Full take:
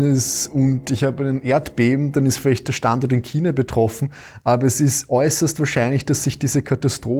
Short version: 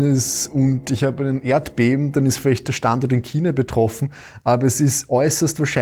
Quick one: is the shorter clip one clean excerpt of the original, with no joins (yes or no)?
yes